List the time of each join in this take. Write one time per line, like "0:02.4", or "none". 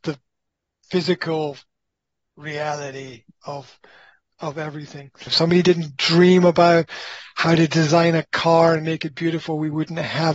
0:05.3